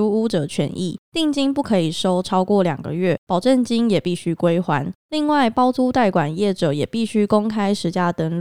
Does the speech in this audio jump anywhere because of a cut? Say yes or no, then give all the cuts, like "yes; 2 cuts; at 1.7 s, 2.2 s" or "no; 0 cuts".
no; 0 cuts